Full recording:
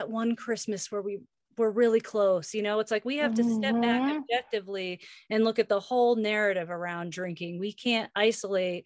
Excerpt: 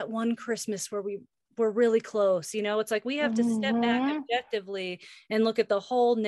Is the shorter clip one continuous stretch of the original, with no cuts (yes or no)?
yes